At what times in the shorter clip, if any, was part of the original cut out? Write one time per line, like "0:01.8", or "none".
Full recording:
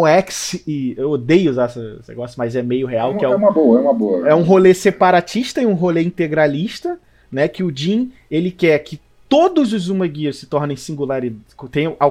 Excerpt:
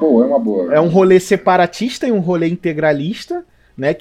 none